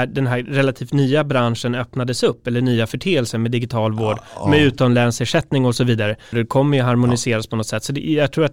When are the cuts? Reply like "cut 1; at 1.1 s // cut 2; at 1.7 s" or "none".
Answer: cut 1; at 6.3 s

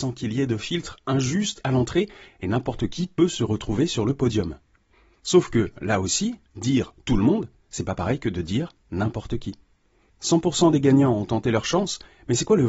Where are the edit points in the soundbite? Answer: cut 1; at 10.1 s

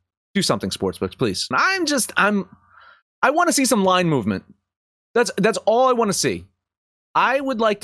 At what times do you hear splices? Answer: cut 1; at 1.5 s

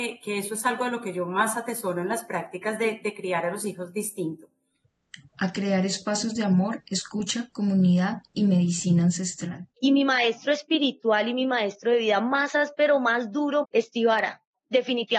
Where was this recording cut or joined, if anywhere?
cut 1; at 9.8 s // cut 2; at 13.6 s

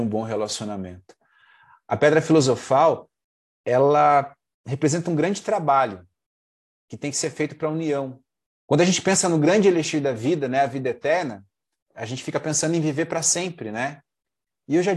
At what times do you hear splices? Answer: cut 1; at 8.5 s

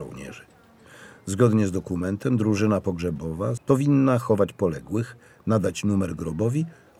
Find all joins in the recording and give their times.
cut 1; at 3.6 s

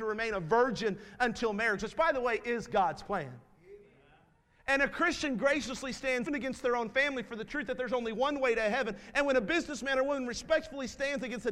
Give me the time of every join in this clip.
cut 1; at 6.3 s

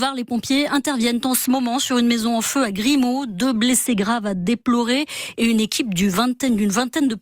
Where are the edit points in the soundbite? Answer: none

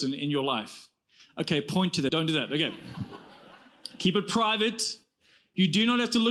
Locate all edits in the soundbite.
cut 1; at 2.1 s

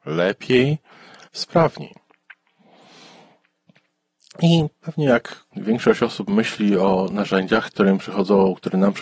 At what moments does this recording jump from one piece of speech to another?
cut 1; at 1.2 s // cut 2; at 5.5 s // cut 3; at 7.7 s

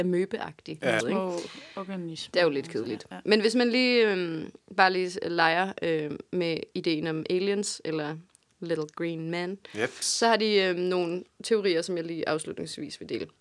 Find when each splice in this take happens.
cut 1; at 1.0 s

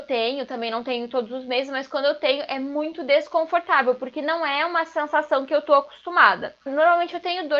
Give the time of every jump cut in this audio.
cut 1; at 6.7 s

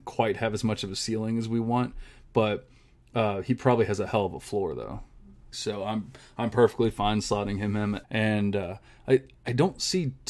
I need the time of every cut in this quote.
cut 1; at 5.5 s // cut 2; at 8.0 s

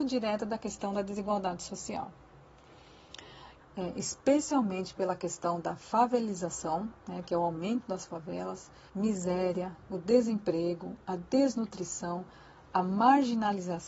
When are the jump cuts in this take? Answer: cut 1; at 3.6 s // cut 2; at 8.9 s

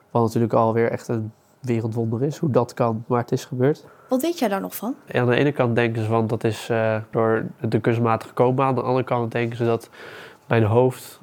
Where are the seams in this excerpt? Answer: cut 1; at 3.1 s // cut 2; at 5.1 s // cut 3; at 7.1 s

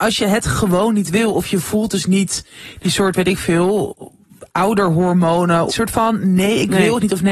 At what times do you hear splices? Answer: cut 1; at 5.7 s

